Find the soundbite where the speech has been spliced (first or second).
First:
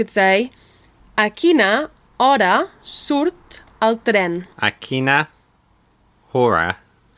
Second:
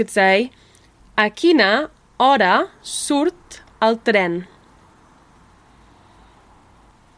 first